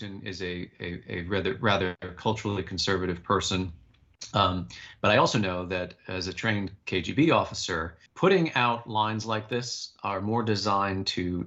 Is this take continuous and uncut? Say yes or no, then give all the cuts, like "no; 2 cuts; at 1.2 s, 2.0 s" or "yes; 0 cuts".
no; 1 cut; at 8.1 s